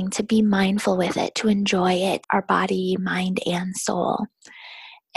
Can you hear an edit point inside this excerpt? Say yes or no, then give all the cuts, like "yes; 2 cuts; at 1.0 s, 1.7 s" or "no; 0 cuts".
yes; 1 cut; at 2.2 s